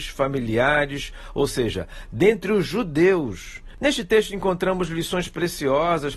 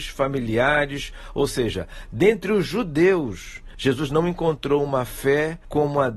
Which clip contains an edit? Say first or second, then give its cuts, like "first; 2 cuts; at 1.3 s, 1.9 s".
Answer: first; 1 cut; at 3.8 s